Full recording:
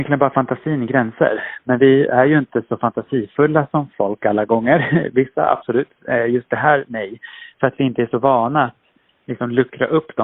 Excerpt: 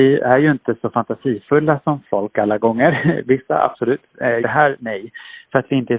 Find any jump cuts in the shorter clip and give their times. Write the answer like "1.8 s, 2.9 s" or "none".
4.4 s